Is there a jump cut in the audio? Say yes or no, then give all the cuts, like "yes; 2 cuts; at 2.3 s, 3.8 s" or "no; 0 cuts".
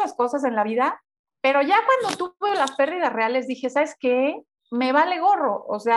no; 0 cuts